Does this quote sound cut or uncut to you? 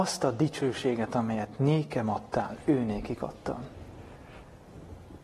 uncut